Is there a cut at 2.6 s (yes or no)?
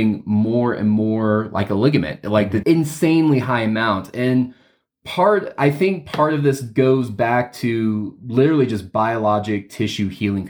yes